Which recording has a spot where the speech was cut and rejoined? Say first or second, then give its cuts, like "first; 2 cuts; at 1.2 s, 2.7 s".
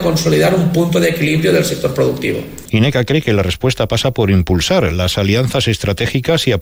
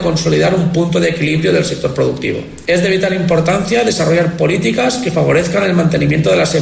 first; 1 cut; at 2.6 s